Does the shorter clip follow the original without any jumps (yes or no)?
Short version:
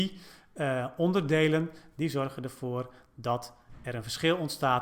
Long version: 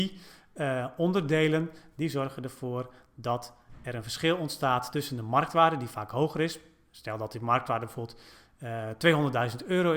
yes